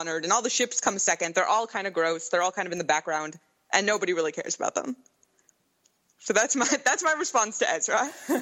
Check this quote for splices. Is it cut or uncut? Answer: uncut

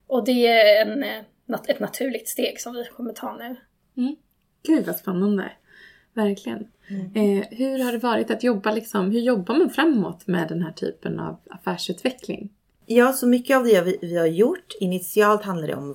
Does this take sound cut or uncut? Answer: uncut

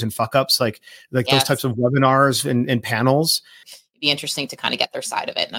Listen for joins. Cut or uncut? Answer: cut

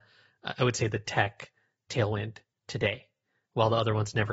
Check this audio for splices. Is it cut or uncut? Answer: uncut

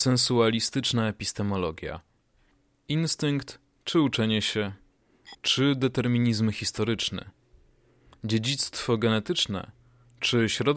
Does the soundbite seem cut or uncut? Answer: cut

